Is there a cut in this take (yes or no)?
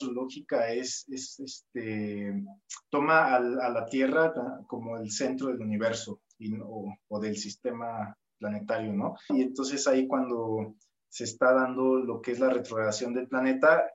yes